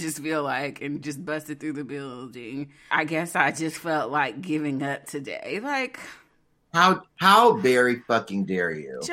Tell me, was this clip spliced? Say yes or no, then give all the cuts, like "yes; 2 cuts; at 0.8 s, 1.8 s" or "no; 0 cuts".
yes; 1 cut; at 2.9 s